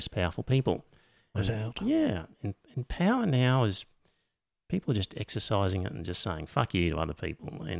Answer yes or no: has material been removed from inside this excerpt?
yes